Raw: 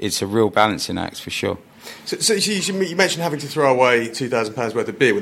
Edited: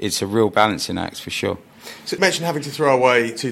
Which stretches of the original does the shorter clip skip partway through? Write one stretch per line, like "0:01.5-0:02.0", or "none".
0:02.2-0:03.0